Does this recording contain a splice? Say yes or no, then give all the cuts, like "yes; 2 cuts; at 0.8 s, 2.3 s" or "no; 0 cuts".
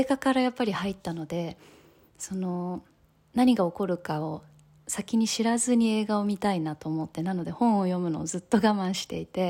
no; 0 cuts